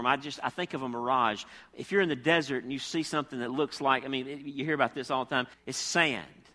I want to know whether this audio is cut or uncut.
cut